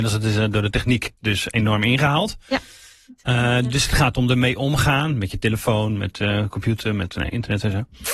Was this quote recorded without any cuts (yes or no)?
yes